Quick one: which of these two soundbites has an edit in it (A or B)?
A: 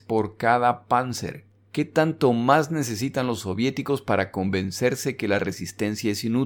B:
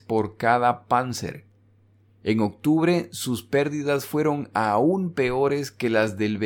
A